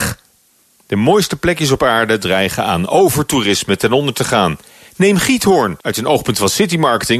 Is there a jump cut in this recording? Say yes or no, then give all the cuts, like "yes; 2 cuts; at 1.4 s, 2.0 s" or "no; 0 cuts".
yes; 1 cut; at 5.8 s